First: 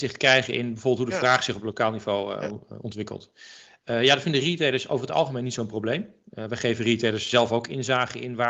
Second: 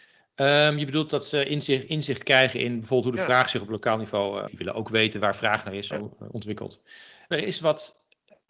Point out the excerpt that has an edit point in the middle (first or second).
second